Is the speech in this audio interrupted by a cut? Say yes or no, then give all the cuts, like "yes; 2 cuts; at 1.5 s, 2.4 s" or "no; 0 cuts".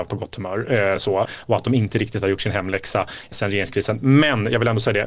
no; 0 cuts